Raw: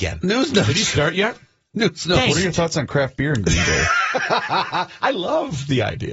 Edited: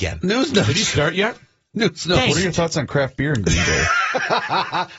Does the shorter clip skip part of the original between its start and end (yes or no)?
no